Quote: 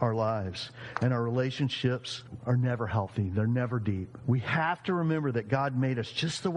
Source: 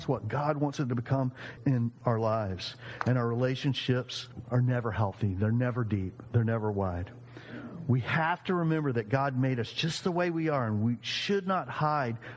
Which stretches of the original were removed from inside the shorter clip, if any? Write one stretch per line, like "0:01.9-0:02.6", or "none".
0:06.3-0:07.8